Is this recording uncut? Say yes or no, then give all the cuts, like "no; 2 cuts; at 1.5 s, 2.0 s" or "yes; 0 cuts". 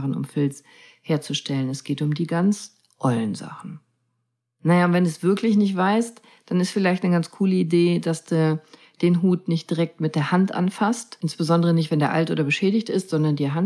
yes; 0 cuts